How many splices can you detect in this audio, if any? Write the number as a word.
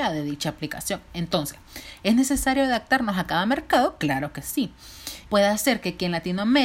one